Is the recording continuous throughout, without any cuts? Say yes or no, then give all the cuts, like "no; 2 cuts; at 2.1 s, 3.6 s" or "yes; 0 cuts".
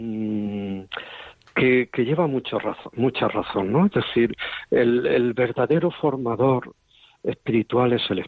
yes; 0 cuts